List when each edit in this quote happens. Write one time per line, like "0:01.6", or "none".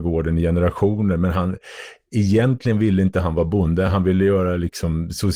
none